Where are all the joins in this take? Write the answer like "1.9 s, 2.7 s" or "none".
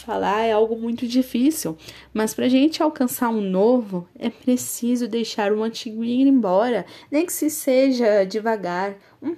7.0 s